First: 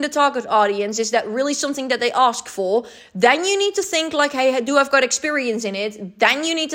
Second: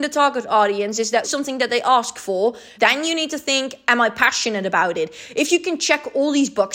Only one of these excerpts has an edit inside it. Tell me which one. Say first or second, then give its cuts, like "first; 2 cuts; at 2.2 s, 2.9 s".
second; 2 cuts; at 1.2 s, 2.7 s